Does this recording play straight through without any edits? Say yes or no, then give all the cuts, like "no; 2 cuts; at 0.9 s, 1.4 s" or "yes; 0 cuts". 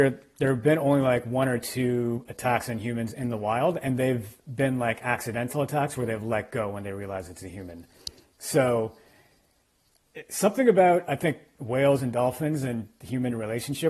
yes; 0 cuts